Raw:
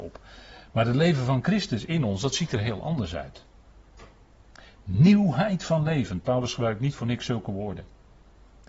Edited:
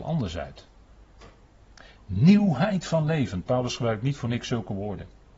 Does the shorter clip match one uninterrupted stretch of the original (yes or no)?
yes